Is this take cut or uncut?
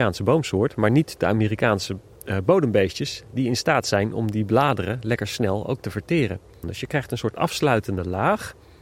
uncut